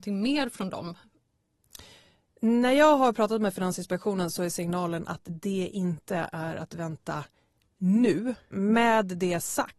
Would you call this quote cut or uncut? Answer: cut